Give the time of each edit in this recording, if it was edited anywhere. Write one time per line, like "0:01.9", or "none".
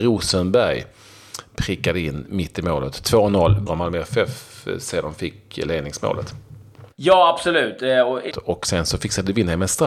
0:03.7
0:06.9
0:08.3